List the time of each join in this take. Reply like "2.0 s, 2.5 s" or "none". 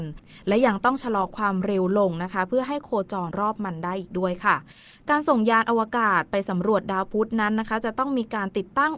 3.3 s

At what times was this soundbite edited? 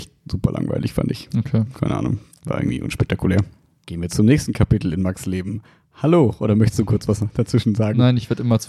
3.8 s

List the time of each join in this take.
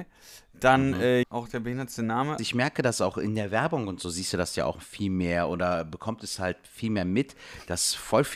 1.2 s, 2.4 s

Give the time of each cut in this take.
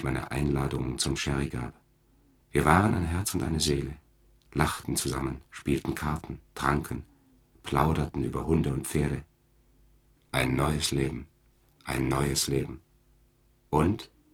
2.4 s, 10.2 s, 11.7 s

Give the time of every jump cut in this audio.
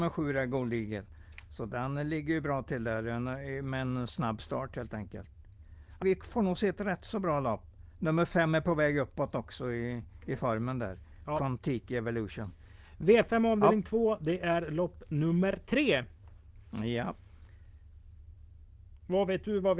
6.0 s

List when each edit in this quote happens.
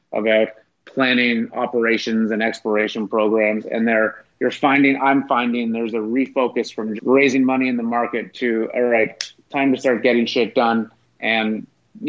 7.0 s

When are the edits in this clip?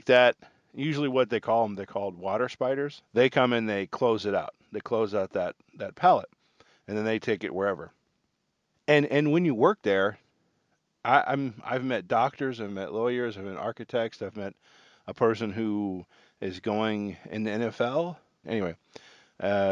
3.0 s, 8.7 s, 18.4 s

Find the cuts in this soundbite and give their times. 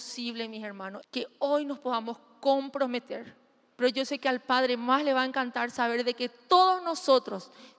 1.0 s, 3.8 s

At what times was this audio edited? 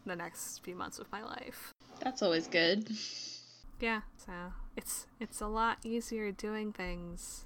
none

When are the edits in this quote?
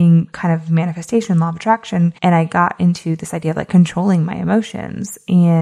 2.2 s

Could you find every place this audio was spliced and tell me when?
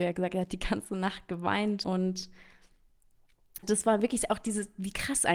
1.8 s, 3.6 s

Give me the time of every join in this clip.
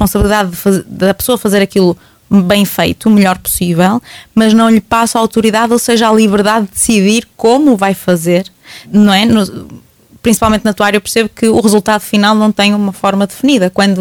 8.8 s

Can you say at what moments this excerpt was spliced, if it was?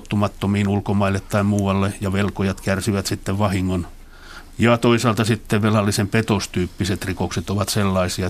4.5 s

